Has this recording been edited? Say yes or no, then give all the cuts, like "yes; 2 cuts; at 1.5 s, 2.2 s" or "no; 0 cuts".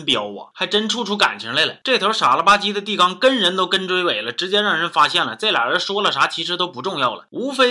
no; 0 cuts